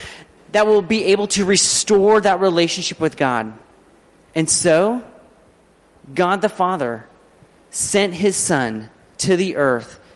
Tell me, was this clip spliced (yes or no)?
no